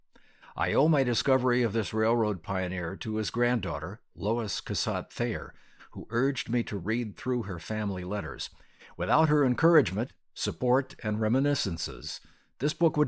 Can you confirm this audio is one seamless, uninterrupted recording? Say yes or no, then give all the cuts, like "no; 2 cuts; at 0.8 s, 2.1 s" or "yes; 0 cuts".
yes; 0 cuts